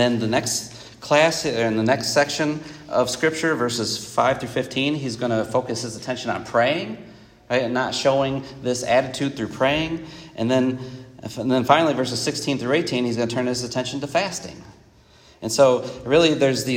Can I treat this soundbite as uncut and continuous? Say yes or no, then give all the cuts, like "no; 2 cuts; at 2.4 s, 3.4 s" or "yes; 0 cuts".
yes; 0 cuts